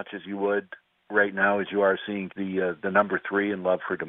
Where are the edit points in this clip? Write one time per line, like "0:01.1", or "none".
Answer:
0:02.3